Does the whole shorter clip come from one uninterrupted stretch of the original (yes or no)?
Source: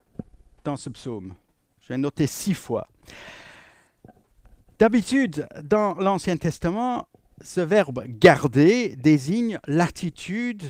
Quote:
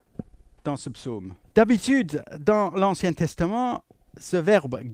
no